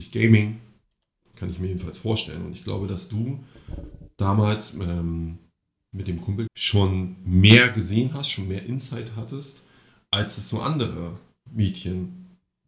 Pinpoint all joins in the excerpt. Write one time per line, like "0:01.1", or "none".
0:01.3
0:06.5